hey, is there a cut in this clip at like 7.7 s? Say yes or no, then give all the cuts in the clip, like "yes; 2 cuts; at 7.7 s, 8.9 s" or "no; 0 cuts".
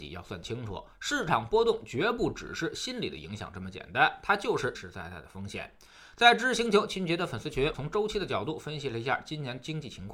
yes; 2 cuts; at 4.7 s, 7.7 s